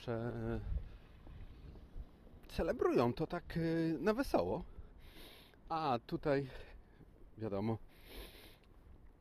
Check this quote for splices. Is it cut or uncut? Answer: uncut